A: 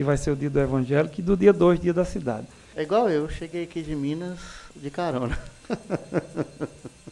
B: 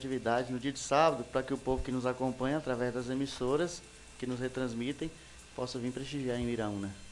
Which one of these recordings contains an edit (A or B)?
A